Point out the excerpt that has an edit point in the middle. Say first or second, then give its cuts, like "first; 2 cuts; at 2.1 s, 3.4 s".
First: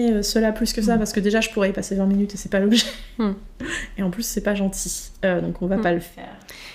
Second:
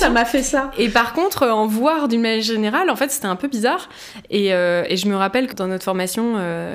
second; 1 cut; at 5.5 s